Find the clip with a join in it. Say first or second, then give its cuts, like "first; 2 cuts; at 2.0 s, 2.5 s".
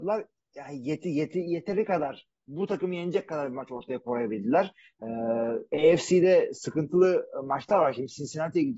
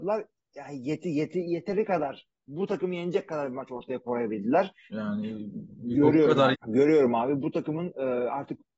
second; 2 cuts; at 4.9 s, 6.5 s